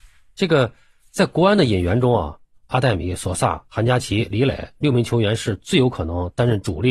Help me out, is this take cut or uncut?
cut